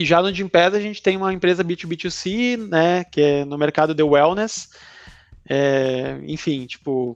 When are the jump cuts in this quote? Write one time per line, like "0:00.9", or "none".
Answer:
none

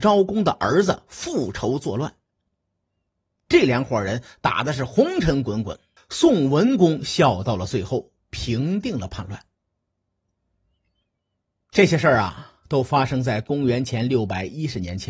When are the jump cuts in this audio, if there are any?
0:06.0

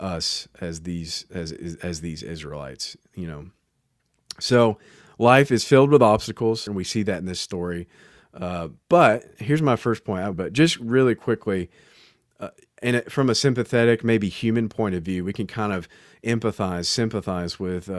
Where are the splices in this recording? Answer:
0:06.7
0:10.3

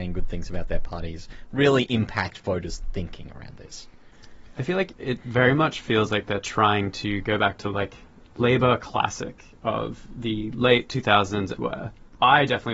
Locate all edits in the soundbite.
0:11.5

